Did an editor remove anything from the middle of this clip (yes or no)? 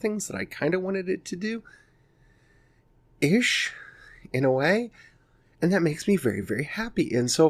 no